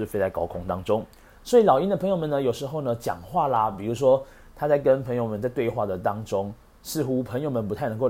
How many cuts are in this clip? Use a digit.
0